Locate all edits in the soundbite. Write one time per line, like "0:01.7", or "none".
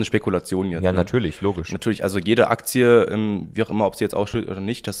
none